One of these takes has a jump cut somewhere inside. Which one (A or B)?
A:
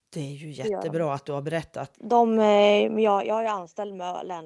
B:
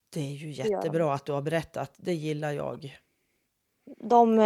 A